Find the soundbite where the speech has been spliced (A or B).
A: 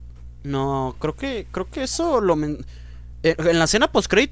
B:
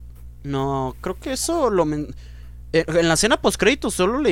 B